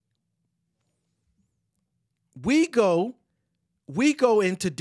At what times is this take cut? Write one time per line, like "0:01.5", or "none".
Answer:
none

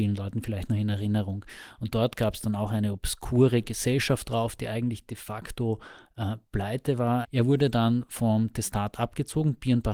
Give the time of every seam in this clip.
0:07.2

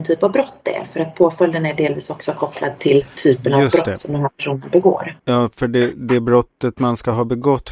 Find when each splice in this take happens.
0:05.2

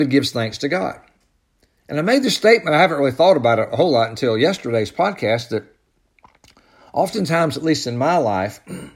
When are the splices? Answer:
none

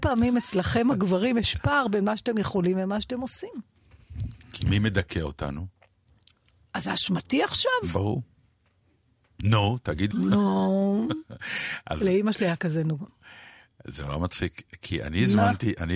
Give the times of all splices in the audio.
0:10.1
0:13.1

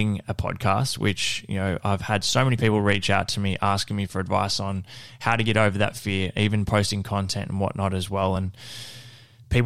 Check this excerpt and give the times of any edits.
none

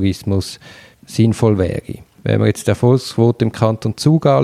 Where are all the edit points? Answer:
none

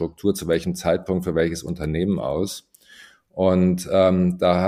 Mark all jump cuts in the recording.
none

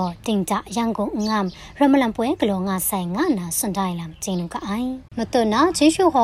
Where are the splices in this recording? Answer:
0:05.1

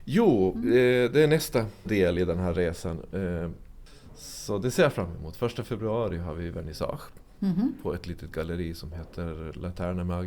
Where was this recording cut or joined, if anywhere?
0:01.8

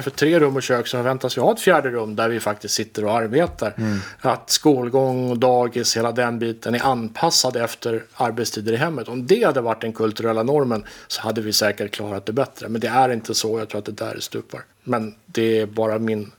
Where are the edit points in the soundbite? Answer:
0:14.7

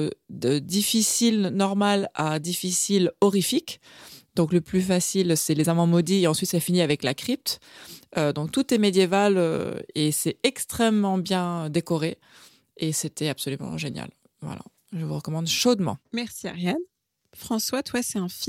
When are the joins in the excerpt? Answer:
none

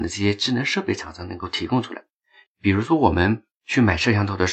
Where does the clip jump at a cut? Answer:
0:02.5

